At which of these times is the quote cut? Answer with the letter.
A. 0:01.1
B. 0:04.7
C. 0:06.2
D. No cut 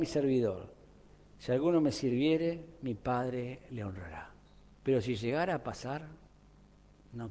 B